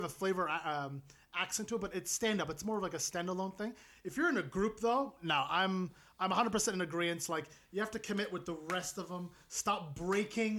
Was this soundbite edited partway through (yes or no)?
no